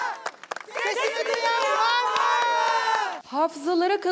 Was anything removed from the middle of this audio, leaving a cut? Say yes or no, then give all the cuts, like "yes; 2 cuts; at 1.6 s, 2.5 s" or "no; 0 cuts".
no; 0 cuts